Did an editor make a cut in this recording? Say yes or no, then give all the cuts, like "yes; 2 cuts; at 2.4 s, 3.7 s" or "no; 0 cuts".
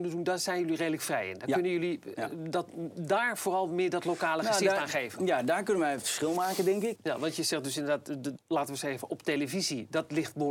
yes; 2 cuts; at 7.0 s, 8.4 s